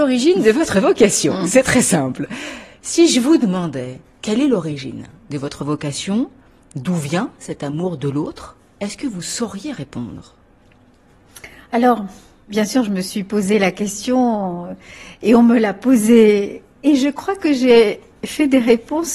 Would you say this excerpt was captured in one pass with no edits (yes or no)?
yes